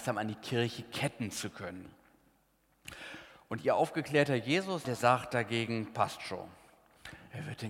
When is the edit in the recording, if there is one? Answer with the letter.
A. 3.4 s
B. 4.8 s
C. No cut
B